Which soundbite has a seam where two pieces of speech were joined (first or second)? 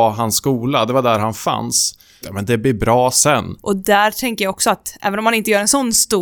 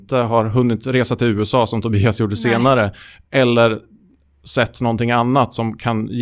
first